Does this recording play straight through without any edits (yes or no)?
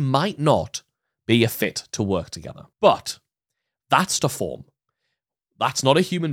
no